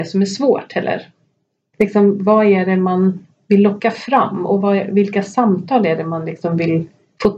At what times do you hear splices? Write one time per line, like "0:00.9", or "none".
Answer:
0:01.7